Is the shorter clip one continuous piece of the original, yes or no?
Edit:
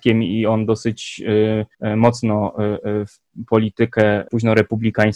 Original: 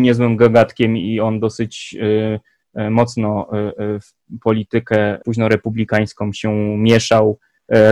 no